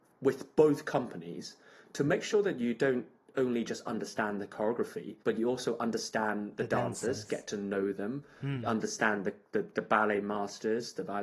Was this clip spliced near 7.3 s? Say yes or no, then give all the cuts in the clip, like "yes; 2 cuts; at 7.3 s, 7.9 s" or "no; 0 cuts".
no; 1 cut; at 5.2 s